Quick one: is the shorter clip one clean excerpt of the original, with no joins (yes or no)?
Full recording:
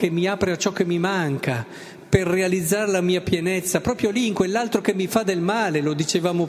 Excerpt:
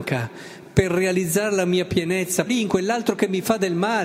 no